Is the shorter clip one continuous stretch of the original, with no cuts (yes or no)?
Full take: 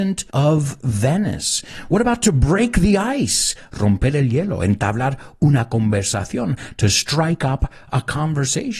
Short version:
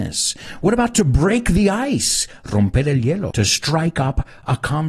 no